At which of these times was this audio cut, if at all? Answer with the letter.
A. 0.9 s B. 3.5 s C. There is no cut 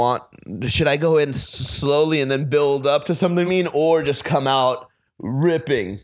B